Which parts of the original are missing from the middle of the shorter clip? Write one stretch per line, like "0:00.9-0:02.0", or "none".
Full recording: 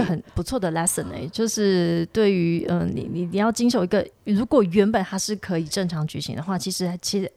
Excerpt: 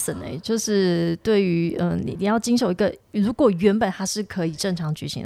0:03.0-0:03.3